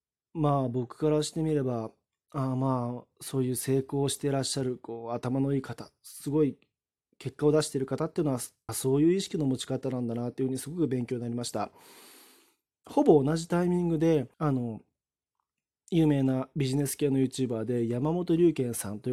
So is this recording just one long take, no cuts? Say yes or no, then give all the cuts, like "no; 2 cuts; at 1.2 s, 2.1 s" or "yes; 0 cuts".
no; 2 cuts; at 8.7 s, 14.3 s